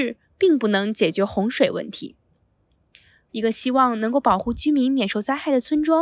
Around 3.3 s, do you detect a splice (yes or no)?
yes